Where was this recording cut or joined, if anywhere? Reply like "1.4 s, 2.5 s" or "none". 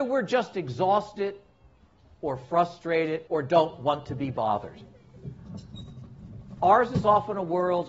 3.3 s

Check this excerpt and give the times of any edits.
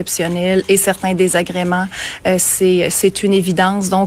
none

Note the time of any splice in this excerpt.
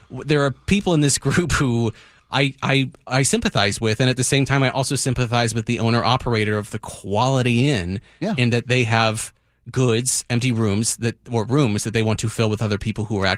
2.3 s

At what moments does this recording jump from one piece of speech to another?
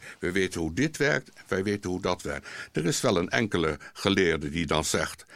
none

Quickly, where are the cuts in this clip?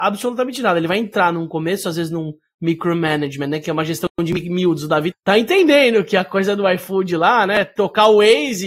5.1 s

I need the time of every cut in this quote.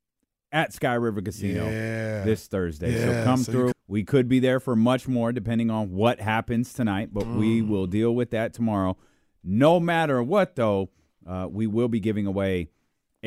3.7 s

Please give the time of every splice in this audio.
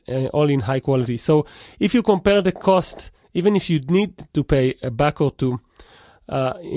none

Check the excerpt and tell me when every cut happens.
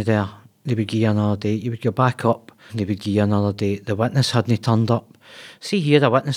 2.7 s

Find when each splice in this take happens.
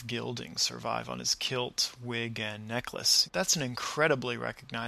3.3 s

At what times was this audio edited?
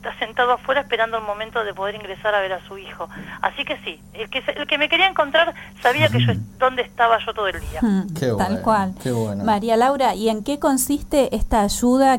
none

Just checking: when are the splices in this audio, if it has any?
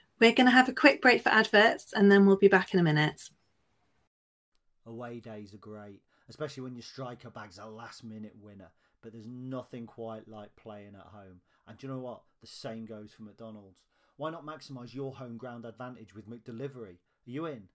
none

